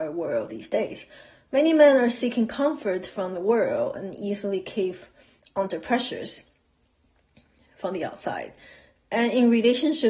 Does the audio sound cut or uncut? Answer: uncut